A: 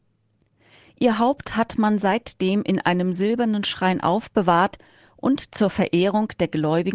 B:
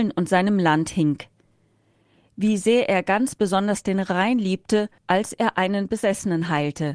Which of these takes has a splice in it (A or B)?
B